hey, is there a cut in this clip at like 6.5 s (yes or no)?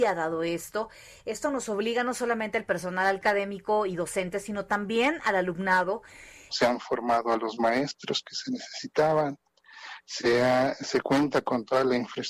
yes